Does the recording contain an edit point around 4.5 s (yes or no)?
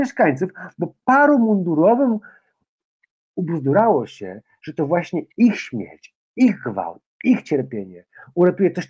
no